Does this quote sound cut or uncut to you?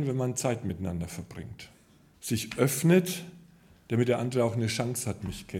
cut